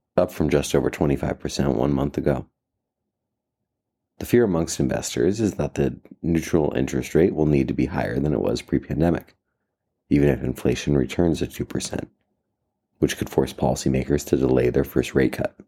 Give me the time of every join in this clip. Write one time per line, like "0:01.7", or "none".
none